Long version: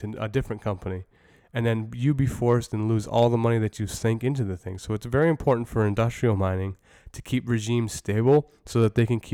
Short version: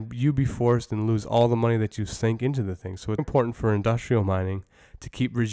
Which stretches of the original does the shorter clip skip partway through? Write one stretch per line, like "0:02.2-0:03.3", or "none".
0:05.0-0:05.3